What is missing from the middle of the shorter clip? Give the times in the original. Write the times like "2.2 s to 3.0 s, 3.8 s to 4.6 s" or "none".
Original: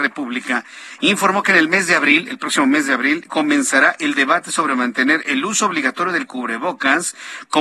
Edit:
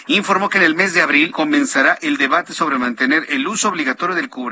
2.3 s to 3.3 s